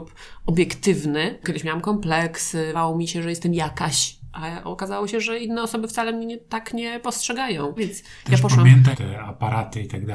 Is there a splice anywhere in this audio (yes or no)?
yes